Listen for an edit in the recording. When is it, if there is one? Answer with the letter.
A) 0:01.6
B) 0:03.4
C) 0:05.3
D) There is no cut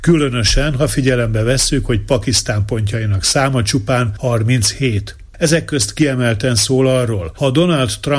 C